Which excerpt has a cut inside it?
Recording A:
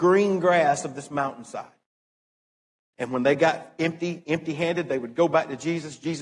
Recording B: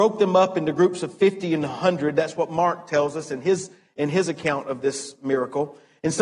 A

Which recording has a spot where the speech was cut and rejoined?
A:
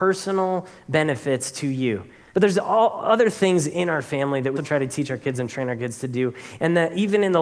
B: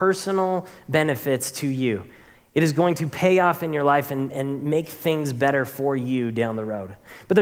A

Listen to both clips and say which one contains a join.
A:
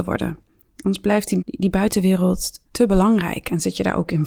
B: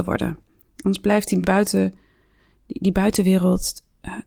A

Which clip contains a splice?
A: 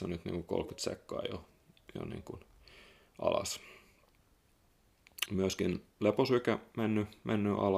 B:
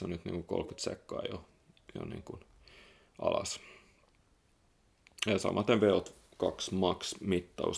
A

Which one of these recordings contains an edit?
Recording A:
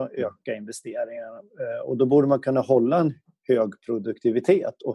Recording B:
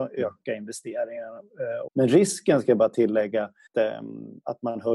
B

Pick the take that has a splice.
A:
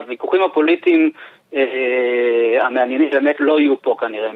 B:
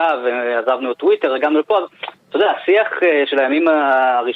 A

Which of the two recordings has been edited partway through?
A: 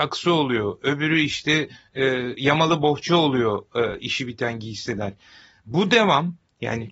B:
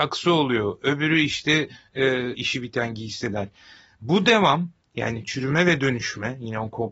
B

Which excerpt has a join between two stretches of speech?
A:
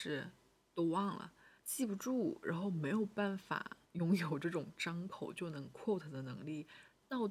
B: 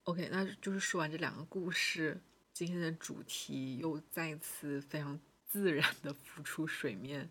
A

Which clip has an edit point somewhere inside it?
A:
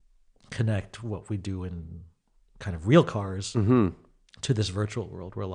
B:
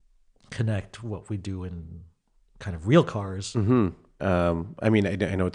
B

